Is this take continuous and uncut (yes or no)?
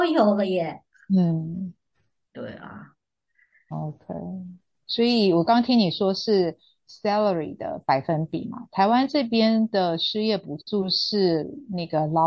yes